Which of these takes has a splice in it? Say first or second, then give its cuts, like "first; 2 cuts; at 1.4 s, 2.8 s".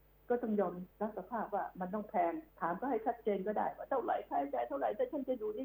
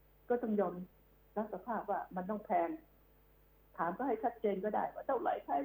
first; 2 cuts; at 0.9 s, 2.5 s